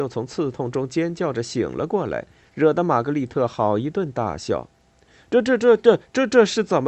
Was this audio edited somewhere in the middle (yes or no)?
no